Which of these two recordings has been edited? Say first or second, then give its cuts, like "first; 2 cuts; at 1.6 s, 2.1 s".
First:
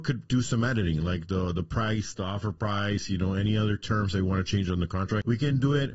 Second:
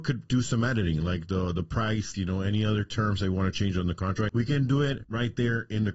second; 1 cut; at 2.1 s